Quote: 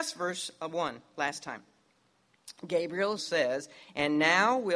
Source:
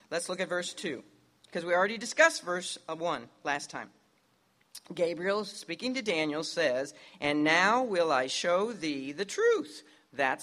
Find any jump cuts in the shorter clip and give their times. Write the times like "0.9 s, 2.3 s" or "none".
3.2 s